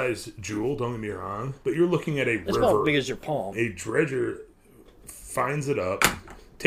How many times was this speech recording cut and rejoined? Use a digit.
1